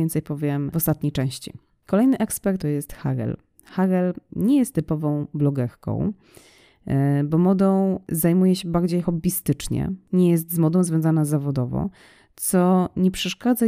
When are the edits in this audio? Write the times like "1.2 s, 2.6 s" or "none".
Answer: 2.6 s